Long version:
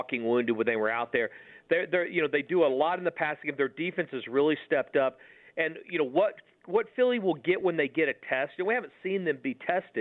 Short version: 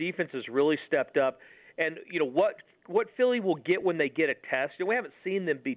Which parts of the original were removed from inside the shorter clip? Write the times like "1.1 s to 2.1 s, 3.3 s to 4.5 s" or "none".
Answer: none

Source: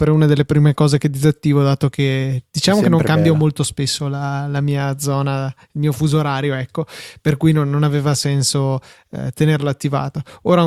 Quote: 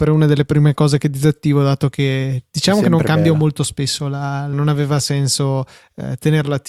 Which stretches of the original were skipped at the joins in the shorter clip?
4.5 s to 7.7 s

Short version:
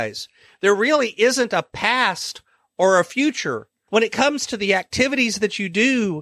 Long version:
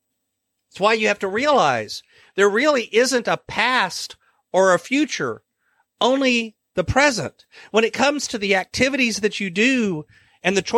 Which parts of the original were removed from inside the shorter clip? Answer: 5.6 s to 7.7 s

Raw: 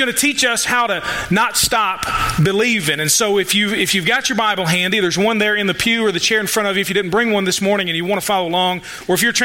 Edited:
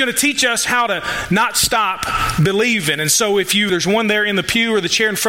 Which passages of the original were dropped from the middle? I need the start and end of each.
3.7 s to 5.0 s

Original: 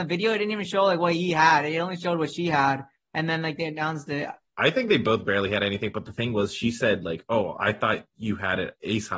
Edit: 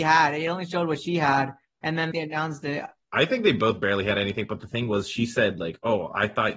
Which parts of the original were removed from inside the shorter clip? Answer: 3.4 s to 3.6 s

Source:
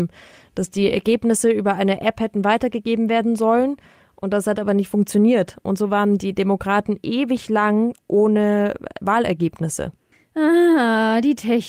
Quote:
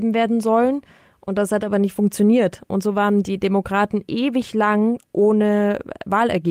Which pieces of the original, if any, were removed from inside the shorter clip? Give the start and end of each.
none

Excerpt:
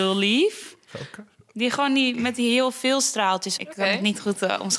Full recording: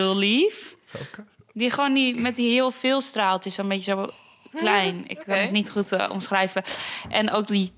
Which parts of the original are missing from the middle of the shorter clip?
3.6 s to 5.1 s

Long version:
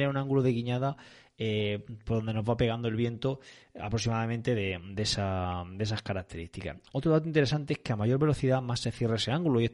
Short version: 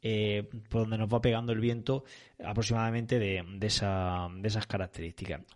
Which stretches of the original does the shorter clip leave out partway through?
none

